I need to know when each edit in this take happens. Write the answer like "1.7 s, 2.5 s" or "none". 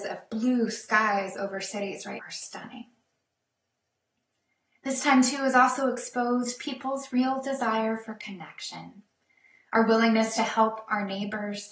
2.2 s